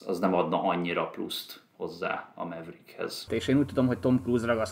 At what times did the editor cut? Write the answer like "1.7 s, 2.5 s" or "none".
3.3 s